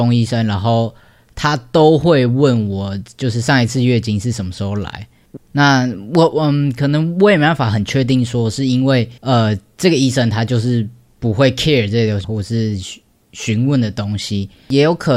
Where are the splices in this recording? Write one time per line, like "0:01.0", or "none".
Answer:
0:05.4
0:09.2
0:12.2